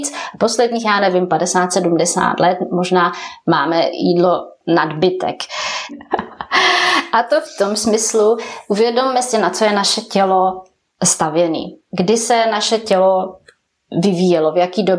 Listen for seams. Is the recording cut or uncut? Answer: cut